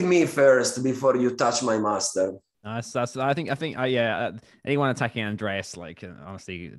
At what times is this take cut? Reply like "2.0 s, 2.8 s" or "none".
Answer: none